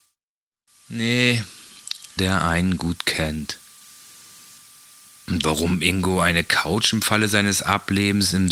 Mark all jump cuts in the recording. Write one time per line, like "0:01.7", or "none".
0:02.2